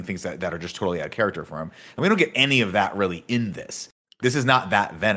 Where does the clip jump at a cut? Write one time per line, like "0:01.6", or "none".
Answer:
none